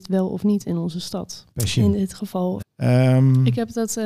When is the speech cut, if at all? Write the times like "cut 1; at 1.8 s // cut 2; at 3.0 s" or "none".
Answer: cut 1; at 1.5 s // cut 2; at 2.6 s